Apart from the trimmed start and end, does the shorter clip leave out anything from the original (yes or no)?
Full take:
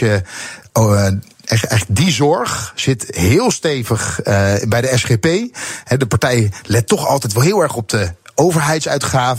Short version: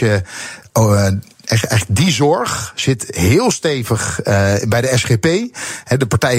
no